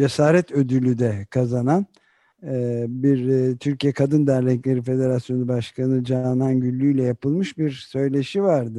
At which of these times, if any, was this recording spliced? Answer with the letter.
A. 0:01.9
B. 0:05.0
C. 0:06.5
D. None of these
D